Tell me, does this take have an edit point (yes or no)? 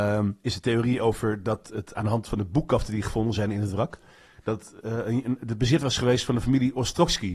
no